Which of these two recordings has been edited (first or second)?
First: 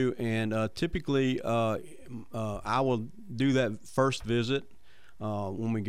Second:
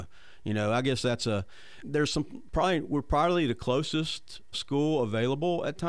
second